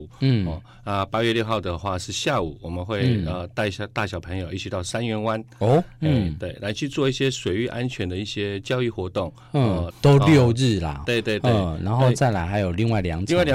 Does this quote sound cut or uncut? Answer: cut